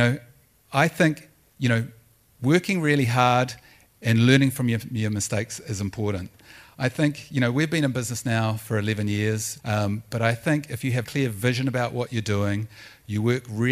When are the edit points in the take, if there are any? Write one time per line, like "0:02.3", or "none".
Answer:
0:09.6
0:11.0